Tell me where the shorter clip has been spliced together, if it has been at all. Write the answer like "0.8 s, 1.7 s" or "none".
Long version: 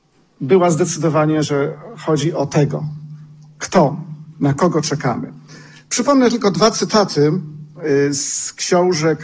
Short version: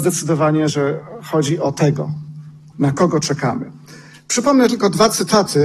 2.7 s